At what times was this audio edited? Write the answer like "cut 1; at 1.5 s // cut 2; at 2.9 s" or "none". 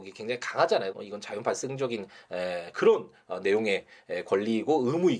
cut 1; at 0.9 s